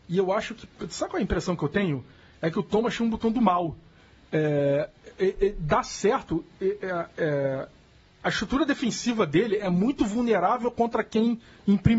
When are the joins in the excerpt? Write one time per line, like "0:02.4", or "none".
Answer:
none